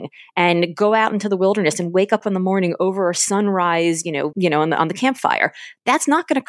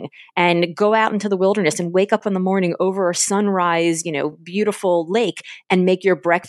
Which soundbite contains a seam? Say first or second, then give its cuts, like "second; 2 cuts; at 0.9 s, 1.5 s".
first; 1 cut; at 4.3 s